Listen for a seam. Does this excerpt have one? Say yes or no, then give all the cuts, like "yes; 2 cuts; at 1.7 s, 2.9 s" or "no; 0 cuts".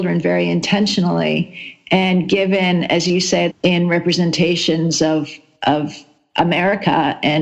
yes; 1 cut; at 3.5 s